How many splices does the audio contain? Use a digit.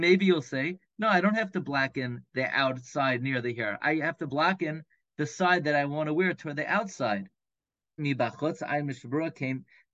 1